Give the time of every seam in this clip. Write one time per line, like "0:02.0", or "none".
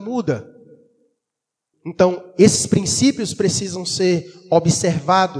0:01.7